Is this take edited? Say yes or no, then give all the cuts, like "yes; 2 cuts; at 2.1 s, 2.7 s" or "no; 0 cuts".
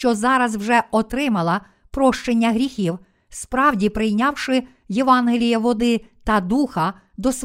no; 0 cuts